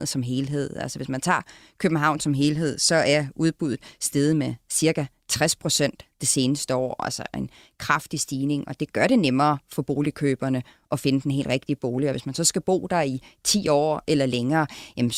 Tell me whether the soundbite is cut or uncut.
uncut